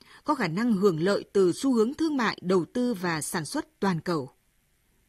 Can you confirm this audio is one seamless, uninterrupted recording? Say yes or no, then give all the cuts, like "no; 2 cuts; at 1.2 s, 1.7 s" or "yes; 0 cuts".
yes; 0 cuts